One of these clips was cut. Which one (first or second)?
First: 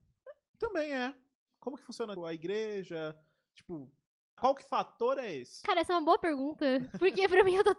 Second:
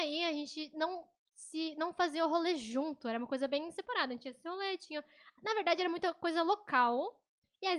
first